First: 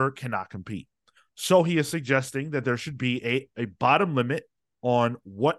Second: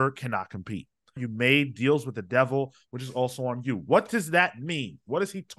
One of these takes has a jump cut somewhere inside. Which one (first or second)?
second